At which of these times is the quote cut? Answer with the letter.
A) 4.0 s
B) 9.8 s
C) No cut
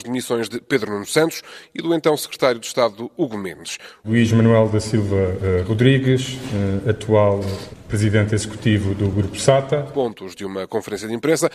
A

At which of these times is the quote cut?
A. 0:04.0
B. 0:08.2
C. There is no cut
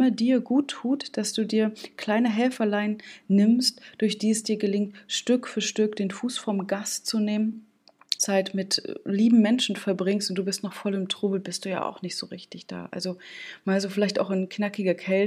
B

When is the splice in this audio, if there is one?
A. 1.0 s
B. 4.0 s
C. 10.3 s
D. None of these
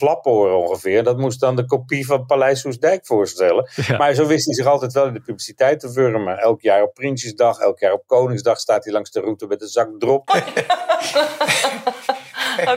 C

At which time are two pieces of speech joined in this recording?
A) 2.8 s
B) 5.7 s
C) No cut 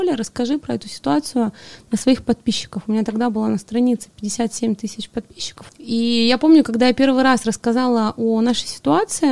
B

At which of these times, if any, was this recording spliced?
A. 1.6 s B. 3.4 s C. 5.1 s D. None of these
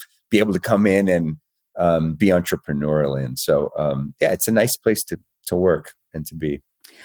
D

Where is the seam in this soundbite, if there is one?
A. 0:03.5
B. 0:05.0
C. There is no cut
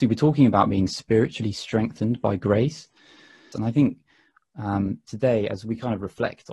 A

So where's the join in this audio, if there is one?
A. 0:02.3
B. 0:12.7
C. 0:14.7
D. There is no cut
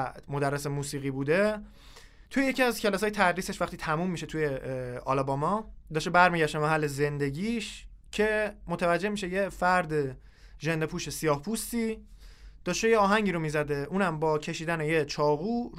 A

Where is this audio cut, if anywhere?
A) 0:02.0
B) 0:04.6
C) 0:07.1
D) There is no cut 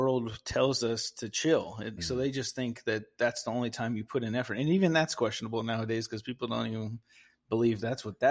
A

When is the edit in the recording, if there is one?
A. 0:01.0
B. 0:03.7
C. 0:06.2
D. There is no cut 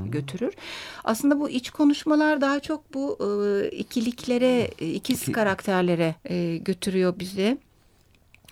C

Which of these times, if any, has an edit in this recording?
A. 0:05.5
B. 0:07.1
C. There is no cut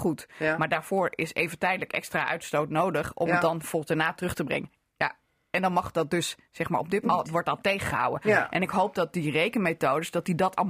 B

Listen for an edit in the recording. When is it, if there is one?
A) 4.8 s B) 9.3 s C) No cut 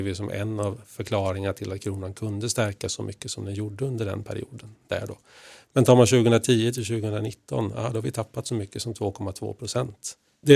C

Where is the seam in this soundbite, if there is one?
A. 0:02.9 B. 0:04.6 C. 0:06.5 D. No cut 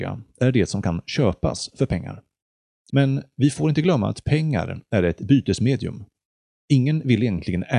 A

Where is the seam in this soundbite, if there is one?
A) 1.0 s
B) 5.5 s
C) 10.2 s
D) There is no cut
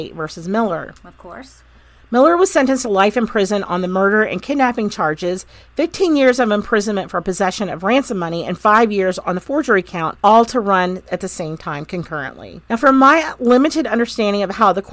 C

